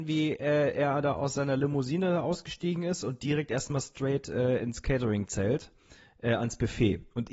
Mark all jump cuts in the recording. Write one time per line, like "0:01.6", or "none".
none